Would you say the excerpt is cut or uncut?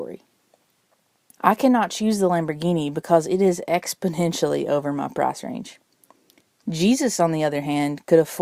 cut